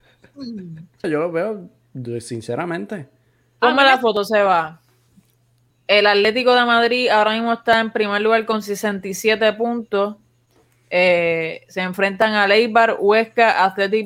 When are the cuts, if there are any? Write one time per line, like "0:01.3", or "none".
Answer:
0:01.0
0:05.7